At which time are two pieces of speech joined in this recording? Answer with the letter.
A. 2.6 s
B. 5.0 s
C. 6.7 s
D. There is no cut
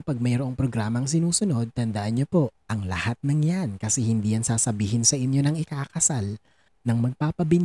A